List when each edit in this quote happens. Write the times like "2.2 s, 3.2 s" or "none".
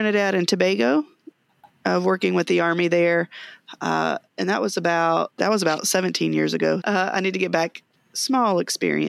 5.3 s, 6.8 s, 7.9 s